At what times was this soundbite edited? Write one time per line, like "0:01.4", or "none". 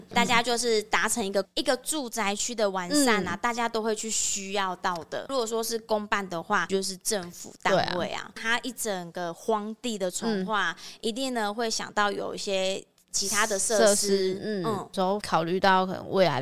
0:01.4
0:05.3
0:15.2